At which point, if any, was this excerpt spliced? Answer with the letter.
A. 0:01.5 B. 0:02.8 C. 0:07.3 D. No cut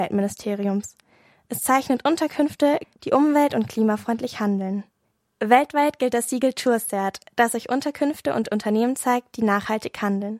B